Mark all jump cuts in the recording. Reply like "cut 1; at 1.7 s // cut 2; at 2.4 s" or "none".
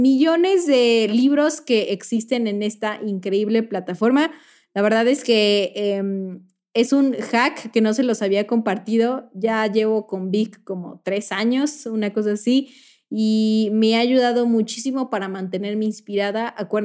none